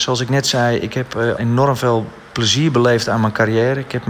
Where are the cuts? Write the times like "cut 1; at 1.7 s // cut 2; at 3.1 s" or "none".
cut 1; at 1.4 s